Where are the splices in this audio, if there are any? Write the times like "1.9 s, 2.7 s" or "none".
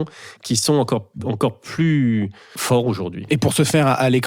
2.6 s

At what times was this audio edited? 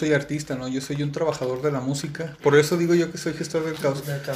2.4 s

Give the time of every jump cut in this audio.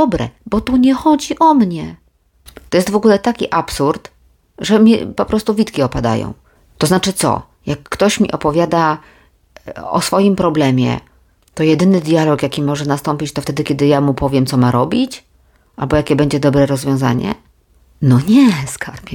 2.7 s

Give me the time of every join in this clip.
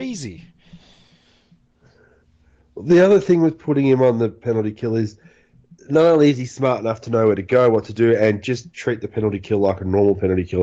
none

